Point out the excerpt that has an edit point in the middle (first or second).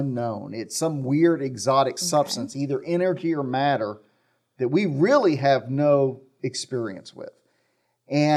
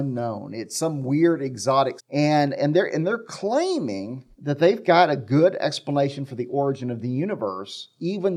second